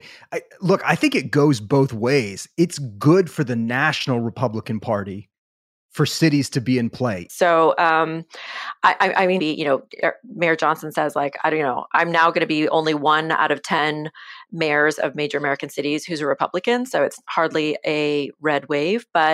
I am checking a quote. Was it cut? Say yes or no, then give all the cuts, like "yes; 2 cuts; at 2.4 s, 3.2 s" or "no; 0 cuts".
yes; 2 cuts; at 7.3 s, 9.4 s